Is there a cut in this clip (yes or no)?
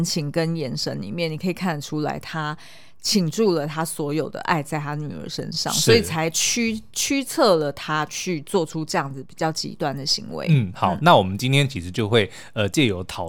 no